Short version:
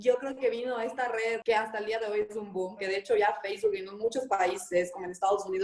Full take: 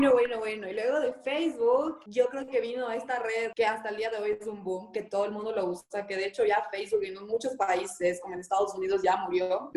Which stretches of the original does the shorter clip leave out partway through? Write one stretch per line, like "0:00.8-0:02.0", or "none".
0:04.9-0:06.1